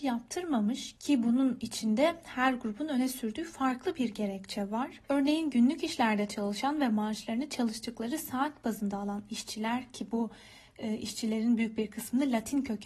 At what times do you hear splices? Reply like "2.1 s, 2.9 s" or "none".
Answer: 5.0 s

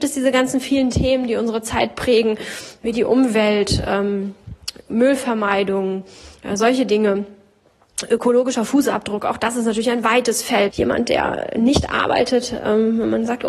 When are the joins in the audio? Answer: 10.7 s

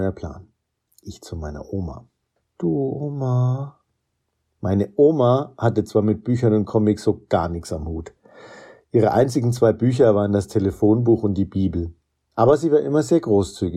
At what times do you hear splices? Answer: none

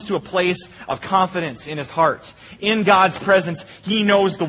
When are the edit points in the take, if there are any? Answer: none

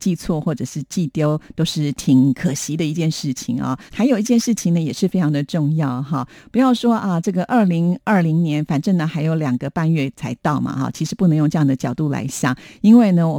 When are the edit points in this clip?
3.9 s

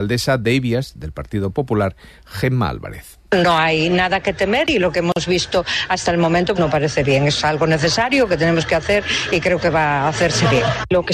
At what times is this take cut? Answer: 6.5 s

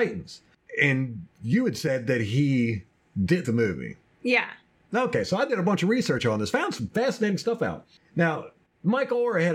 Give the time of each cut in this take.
3.4 s

